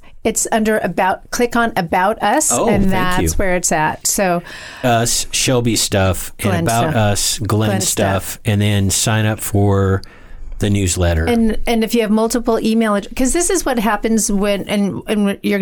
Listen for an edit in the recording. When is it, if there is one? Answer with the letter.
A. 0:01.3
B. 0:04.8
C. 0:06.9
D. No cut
B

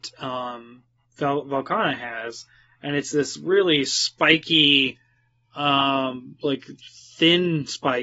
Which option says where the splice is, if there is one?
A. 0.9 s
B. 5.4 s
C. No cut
C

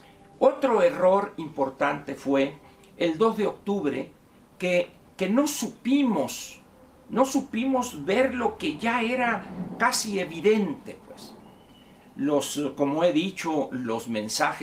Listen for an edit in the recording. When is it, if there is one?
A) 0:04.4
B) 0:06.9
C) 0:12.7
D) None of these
D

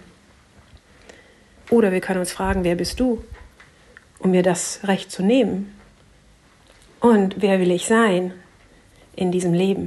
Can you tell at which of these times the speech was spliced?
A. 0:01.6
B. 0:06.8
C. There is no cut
A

